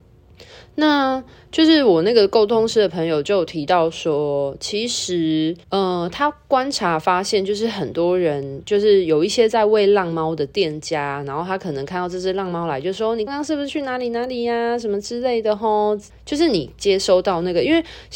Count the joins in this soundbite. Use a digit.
3